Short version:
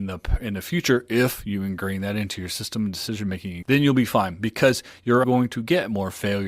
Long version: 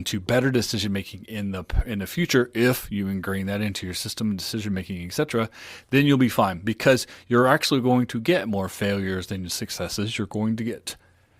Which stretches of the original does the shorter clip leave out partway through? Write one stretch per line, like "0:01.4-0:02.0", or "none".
0:05.1-0:05.9
0:07.5-0:07.8